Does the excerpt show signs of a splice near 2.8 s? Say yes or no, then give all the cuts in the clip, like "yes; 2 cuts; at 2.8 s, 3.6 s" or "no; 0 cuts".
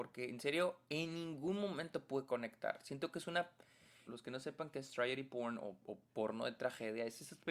no; 1 cut; at 4.1 s